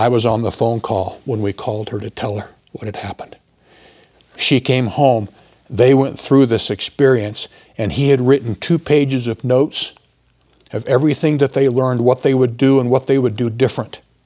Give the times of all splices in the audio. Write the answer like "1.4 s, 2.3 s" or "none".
2.6 s